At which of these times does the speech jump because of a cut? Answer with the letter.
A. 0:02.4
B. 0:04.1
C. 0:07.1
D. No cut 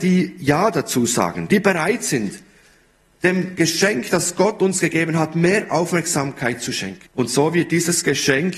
C